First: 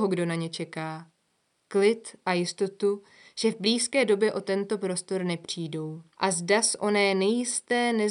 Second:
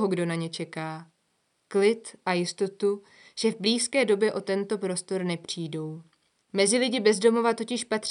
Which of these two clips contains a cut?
first; 1 cut; at 6.1 s

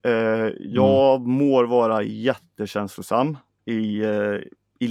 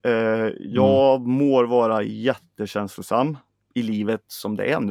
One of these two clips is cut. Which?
second; 1 cut; at 3.6 s

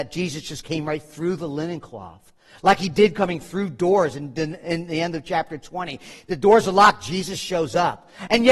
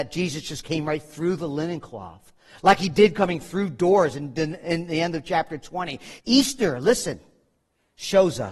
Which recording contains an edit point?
second; 1 cut; at 6.2 s

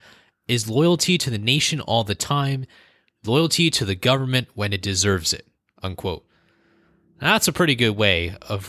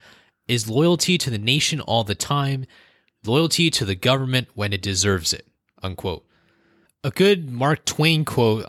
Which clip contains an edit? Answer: second; 1 cut; at 6.9 s

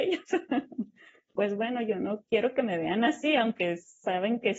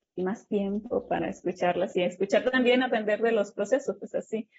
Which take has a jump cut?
first; 1 cut; at 1.4 s

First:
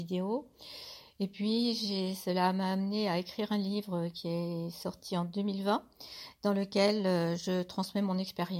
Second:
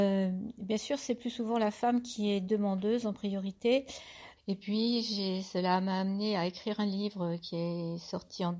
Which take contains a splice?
second; 1 cut; at 4.4 s

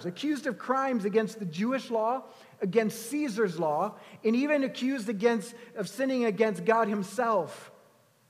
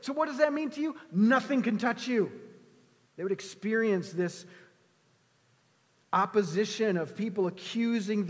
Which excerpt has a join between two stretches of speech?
second; 1 cut; at 3.1 s

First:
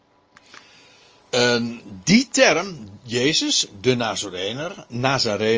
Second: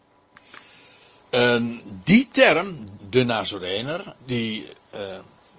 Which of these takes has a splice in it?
second; 2 cuts; at 3.0 s, 4.2 s

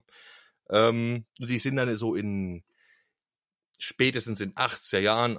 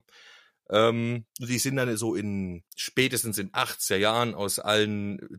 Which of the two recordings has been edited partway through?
second; 1 cut; at 2.7 s

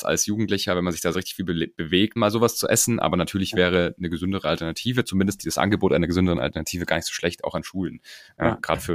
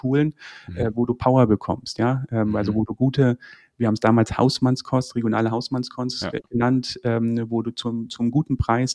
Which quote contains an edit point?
first; 1 cut; at 2.2 s

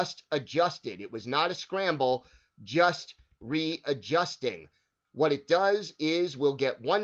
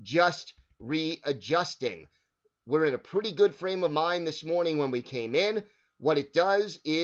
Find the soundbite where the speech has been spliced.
first; 1 cut; at 5.0 s

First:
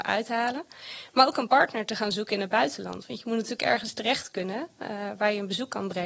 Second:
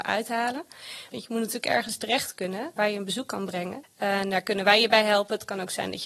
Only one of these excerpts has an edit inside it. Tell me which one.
second; 3 cuts; at 1.1 s, 2.8 s, 3.8 s

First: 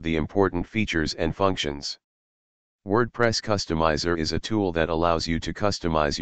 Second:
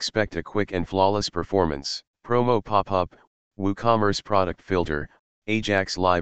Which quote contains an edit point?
second; 1 cut; at 2.1 s

